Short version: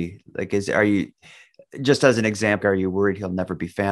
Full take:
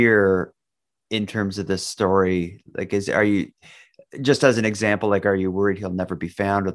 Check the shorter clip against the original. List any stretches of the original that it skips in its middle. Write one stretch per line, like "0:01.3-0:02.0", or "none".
0:05.0-0:05.2